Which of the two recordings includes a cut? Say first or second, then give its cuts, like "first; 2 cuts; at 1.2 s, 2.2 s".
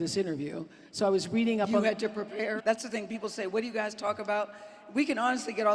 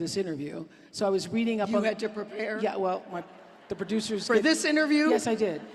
first; 1 cut; at 2.6 s